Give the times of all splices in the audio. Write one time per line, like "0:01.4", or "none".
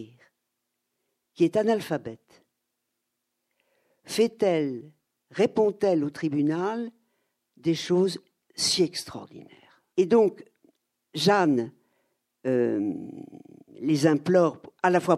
0:09.9